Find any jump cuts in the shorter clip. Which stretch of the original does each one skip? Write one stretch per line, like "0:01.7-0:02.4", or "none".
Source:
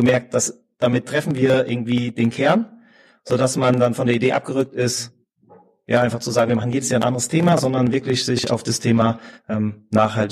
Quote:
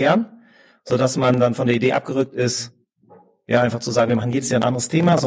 none